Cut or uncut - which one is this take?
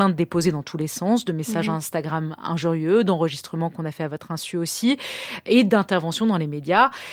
uncut